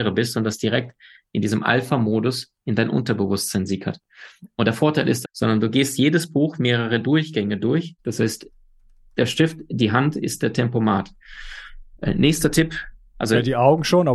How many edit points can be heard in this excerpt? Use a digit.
2